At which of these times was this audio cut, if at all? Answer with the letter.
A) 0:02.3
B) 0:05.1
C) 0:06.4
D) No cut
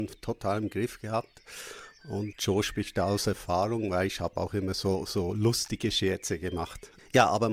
A